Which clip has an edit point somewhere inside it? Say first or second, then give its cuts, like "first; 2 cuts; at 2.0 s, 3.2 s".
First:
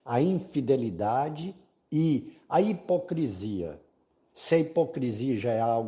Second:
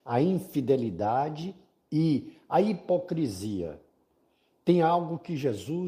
first; 1 cut; at 4.3 s